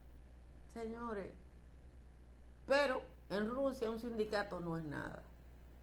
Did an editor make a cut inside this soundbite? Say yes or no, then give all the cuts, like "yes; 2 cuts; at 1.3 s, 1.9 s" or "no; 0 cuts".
yes; 1 cut; at 2.6 s